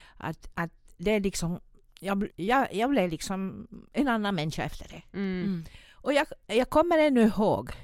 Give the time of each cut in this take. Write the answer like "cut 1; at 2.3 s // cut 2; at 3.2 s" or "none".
cut 1; at 2.3 s